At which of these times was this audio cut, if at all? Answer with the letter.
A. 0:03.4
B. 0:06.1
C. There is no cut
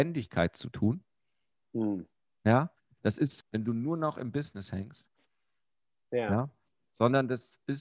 A